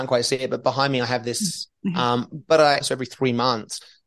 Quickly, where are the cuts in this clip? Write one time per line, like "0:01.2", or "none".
0:01.7
0:02.8

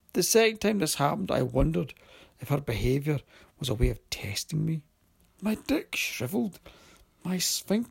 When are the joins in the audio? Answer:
0:05.2

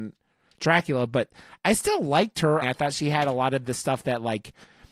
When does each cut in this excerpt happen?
0:02.6

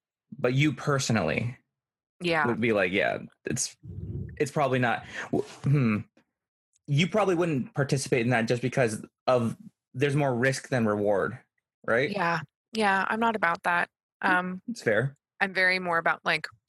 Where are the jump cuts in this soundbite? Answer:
none

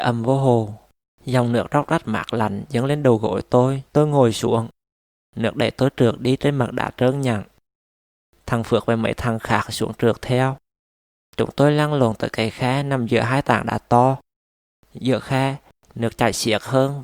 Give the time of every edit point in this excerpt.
0:01.1
0:03.9

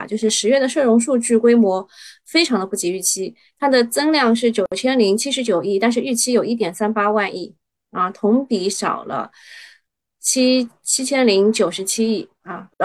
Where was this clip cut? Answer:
none

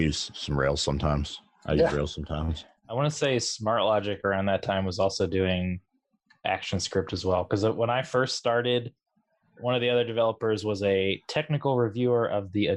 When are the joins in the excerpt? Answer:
none

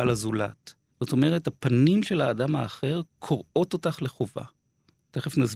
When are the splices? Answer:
0:00.9

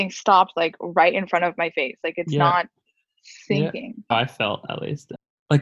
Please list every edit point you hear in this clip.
0:04.1

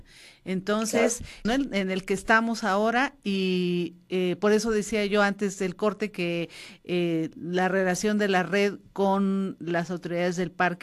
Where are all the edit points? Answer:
0:01.4
0:07.4

